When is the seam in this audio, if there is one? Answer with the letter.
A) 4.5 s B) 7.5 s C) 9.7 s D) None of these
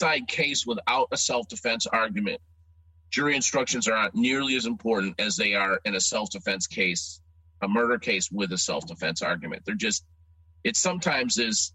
D